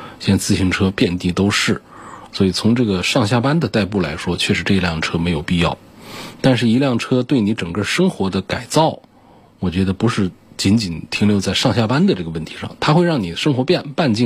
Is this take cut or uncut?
uncut